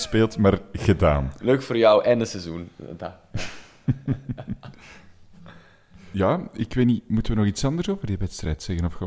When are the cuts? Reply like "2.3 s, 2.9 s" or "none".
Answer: none